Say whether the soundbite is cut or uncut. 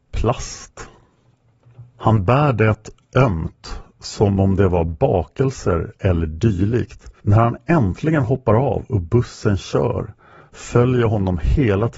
cut